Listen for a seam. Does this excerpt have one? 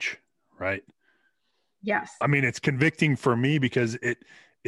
yes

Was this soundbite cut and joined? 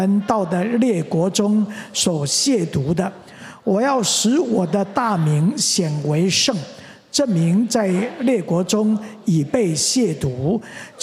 no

